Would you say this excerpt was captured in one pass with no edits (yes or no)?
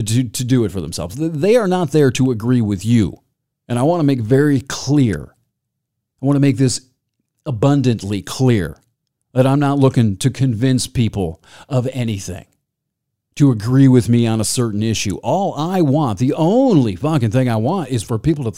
yes